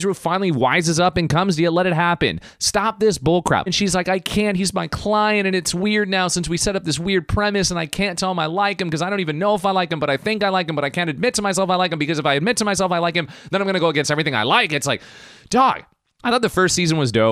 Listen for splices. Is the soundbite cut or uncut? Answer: cut